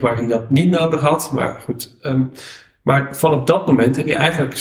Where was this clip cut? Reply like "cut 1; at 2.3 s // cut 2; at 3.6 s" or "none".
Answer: none